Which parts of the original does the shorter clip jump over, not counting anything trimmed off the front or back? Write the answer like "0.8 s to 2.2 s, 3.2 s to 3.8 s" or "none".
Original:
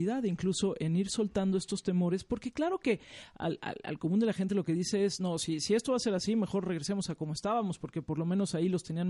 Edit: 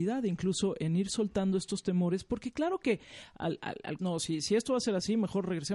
4.0 s to 5.2 s

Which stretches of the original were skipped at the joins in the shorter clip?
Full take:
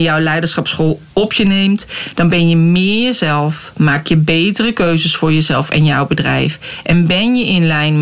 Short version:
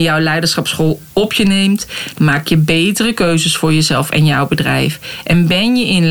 2.1 s to 3.7 s

